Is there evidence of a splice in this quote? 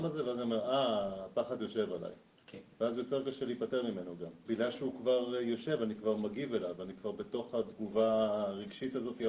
yes; 1 cut; at 4.4 s

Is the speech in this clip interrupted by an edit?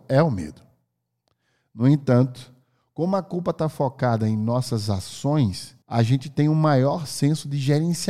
yes; 1 cut; at 5.8 s

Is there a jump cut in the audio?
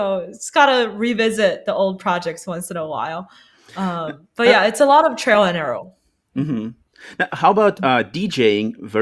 no; 0 cuts

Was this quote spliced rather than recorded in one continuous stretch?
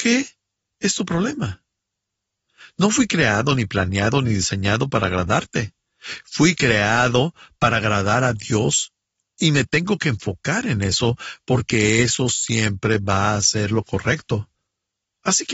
no; 0 cuts

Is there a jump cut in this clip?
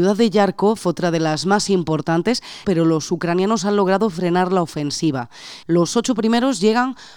yes; 2 cuts; at 2.6 s, 5.6 s

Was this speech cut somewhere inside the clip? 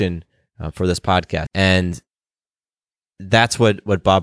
yes; 1 cut; at 1.5 s

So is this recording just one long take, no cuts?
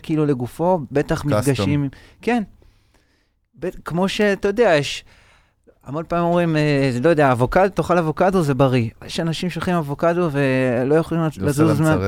yes; 0 cuts

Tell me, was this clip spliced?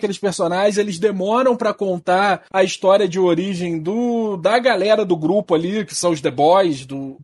no; 0 cuts

